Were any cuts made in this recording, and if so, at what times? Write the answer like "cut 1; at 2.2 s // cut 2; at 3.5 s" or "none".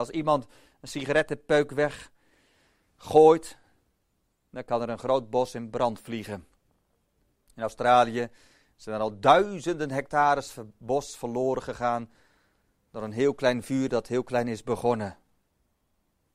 none